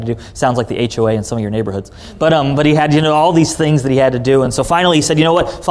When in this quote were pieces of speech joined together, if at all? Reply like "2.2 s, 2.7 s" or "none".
none